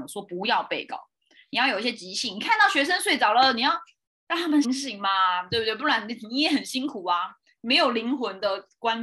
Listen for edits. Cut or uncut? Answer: cut